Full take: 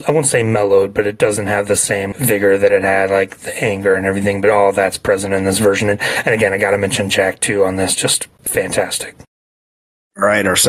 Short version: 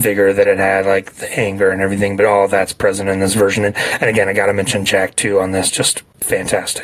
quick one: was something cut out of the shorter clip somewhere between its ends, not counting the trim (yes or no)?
no